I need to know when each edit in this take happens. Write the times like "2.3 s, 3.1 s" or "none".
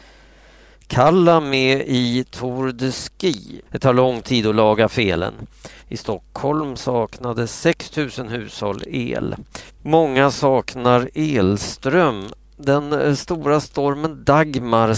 3.7 s, 5.8 s, 9.7 s